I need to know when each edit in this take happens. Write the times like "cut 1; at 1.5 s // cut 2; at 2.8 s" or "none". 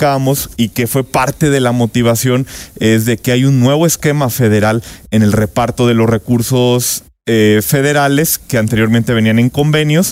none